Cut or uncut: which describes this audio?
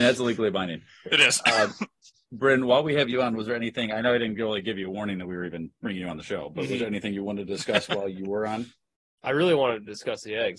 uncut